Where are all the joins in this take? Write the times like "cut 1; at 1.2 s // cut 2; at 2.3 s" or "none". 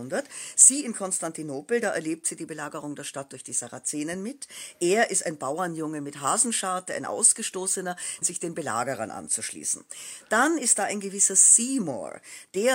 cut 1; at 8.2 s